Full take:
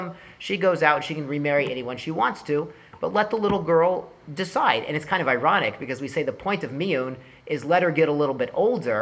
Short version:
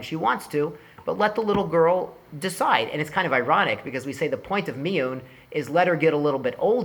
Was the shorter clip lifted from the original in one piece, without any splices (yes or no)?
yes